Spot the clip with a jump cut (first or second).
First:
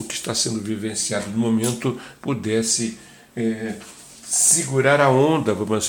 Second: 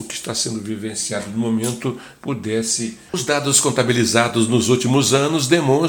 second